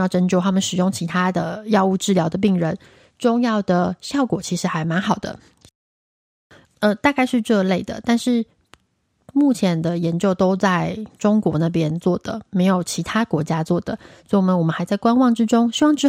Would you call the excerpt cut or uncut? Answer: cut